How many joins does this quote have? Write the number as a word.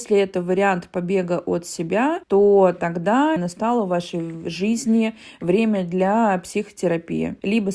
two